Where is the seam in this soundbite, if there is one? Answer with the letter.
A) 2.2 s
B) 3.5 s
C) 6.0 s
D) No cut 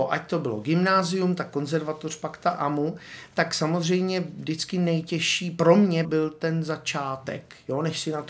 C